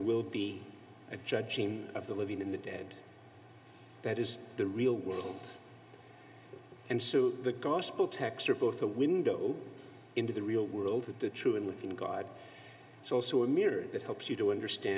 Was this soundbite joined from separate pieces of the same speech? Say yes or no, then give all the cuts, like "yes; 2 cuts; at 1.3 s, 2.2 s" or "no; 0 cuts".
yes; 1 cut; at 11.0 s